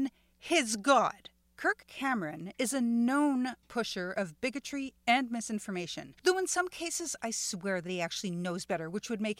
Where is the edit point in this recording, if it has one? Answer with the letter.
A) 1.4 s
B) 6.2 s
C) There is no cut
A